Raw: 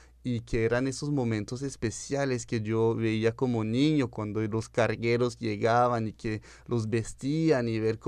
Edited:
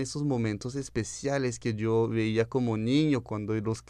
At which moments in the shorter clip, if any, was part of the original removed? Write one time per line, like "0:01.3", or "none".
none